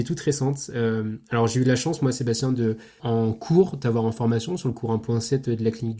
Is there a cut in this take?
yes; 1 cut; at 3.0 s

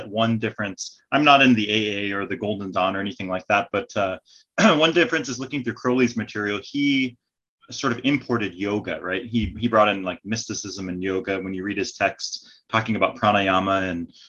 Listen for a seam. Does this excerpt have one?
no; 0 cuts

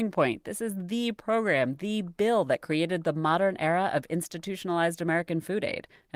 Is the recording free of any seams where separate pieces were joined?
yes; 0 cuts

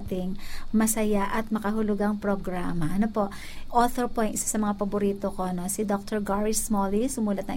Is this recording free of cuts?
no; 1 cut; at 3.7 s

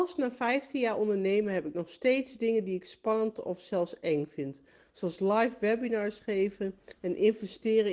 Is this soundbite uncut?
yes; 0 cuts

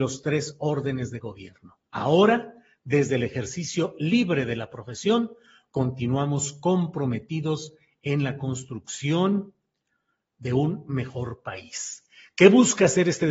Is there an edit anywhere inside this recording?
yes; 1 cut; at 1.9 s

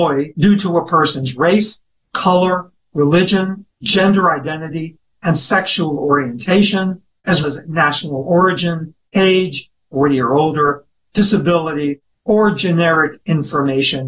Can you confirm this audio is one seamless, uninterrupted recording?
no; 2 cuts; at 3.7 s, 7.4 s

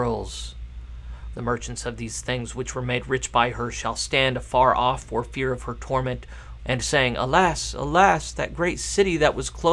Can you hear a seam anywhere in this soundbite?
yes; 2 cuts; at 1.3 s, 6.6 s

